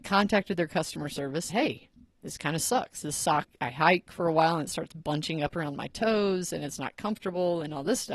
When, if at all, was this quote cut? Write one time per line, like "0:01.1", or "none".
0:01.5